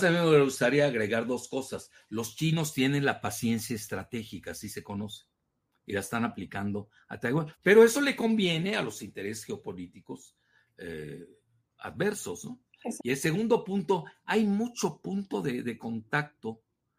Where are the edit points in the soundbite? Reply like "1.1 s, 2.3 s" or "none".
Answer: 7.5 s, 13.0 s